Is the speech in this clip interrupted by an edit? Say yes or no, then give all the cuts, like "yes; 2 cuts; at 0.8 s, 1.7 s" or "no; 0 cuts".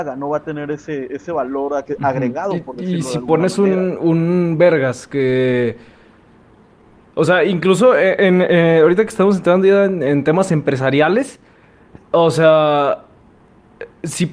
no; 0 cuts